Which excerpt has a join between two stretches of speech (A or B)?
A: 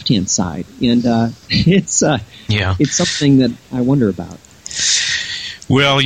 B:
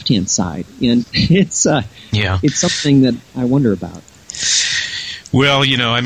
B